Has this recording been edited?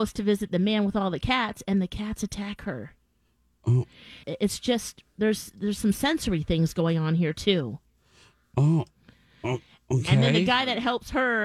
yes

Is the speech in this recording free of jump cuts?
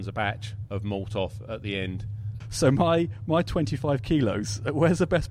no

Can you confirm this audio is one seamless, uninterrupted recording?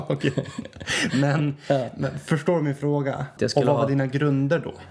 no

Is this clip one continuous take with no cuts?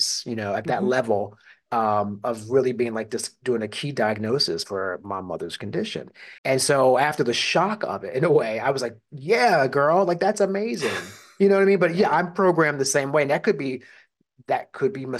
no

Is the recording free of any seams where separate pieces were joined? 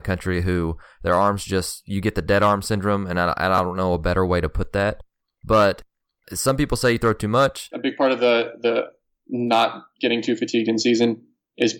no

